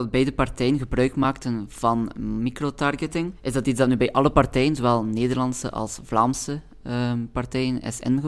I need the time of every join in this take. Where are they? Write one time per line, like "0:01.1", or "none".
0:03.3